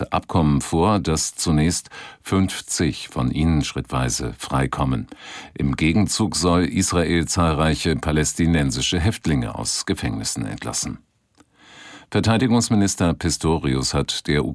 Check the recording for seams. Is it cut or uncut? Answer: uncut